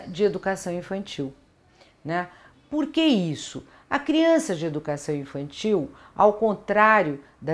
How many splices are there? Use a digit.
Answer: 0